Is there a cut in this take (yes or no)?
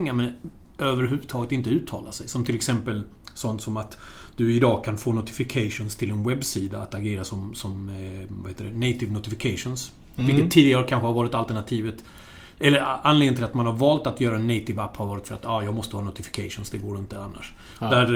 no